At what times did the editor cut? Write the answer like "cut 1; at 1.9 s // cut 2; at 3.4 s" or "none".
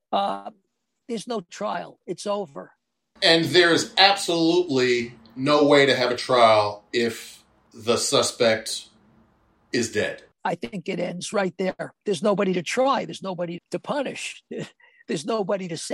cut 1; at 3.2 s // cut 2; at 10.3 s // cut 3; at 13.6 s